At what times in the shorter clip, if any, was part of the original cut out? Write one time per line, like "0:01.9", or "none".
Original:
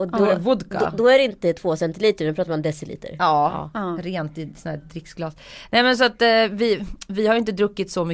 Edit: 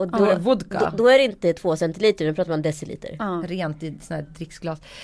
0:03.2